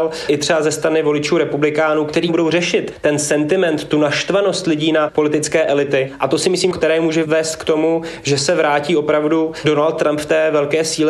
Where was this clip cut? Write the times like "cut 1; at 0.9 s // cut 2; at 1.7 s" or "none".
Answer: cut 1; at 6.7 s